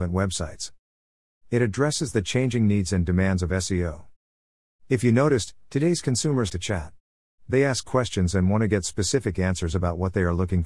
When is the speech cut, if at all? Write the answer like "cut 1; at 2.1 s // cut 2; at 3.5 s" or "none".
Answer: cut 1; at 6.5 s